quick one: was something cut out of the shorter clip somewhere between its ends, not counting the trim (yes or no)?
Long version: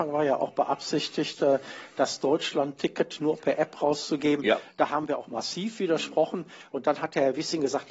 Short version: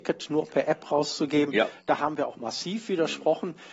no